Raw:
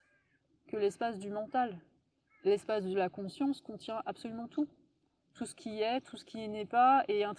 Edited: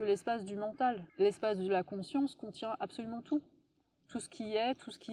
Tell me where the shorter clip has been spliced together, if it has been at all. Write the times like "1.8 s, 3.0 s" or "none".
1.1 s

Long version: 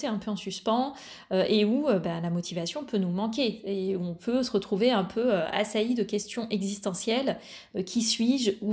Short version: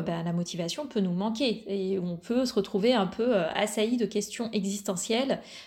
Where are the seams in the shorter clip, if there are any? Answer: none

